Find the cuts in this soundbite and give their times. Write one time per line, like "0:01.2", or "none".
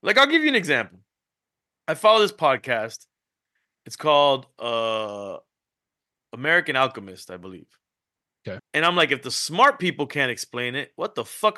0:08.6